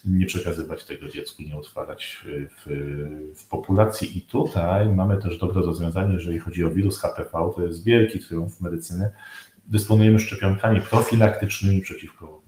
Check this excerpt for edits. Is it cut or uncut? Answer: uncut